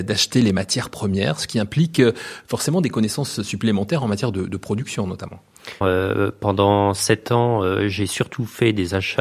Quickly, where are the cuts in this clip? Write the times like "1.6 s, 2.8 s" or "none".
5.8 s